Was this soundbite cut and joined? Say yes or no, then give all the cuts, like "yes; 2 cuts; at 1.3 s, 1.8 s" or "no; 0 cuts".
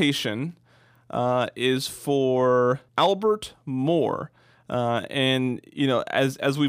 yes; 1 cut; at 2.9 s